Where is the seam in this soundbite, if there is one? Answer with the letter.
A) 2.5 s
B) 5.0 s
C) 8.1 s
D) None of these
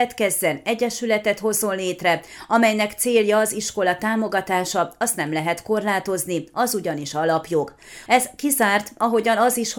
C